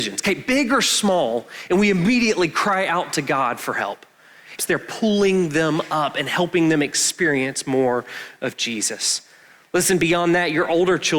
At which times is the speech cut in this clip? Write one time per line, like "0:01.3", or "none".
0:04.6